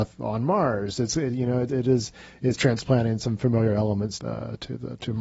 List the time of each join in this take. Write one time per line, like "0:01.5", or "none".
none